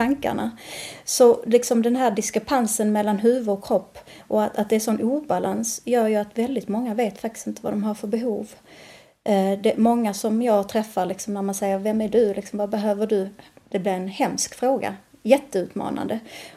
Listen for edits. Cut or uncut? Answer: uncut